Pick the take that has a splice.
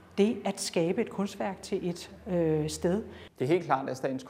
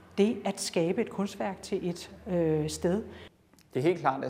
first; 1 cut; at 3.3 s

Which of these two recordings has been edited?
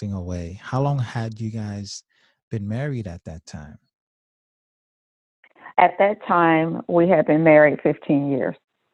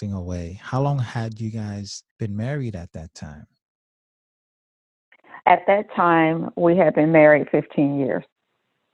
second; 1 cut; at 2.1 s

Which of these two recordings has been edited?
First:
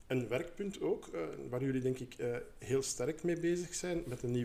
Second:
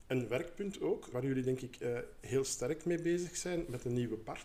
second; 1 cut; at 1.1 s

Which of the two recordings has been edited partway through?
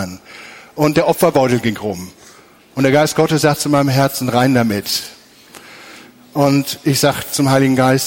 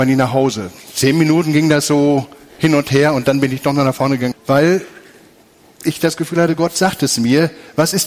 second; 1 cut; at 4.3 s

